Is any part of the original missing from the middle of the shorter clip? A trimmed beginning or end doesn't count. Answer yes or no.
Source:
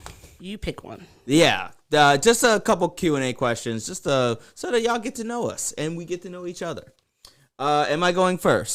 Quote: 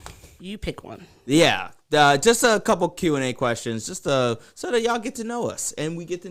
no